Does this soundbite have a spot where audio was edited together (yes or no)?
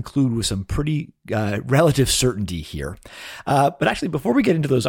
no